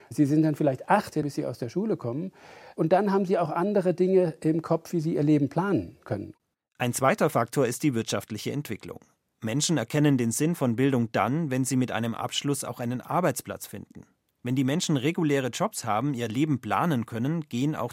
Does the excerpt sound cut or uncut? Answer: cut